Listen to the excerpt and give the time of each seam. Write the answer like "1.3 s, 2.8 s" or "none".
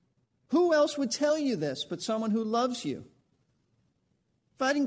none